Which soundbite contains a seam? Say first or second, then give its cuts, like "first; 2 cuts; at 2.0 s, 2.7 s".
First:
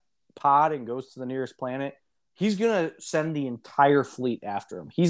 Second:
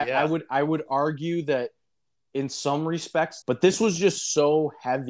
second; 1 cut; at 3.4 s